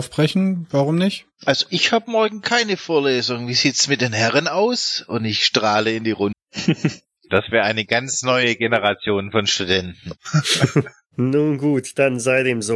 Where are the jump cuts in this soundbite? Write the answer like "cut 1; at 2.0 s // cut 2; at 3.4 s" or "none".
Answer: cut 1; at 6.3 s